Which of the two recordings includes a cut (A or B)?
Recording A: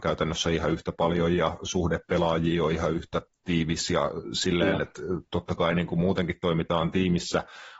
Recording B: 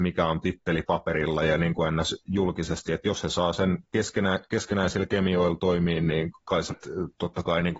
B